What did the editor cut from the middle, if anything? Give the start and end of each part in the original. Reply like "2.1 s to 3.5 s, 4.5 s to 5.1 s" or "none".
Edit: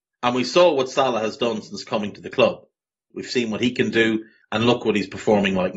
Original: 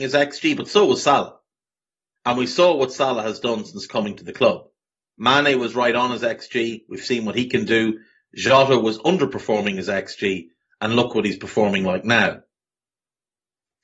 5.1 s to 6.8 s, 8.2 s to 10.7 s